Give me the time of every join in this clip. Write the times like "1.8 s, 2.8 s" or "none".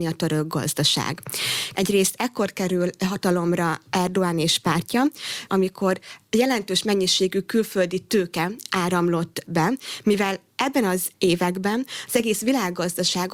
1.7 s, 5.5 s